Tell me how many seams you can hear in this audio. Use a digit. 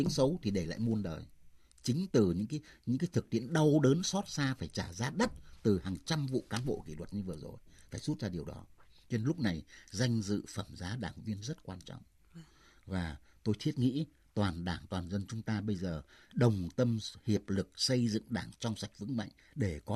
1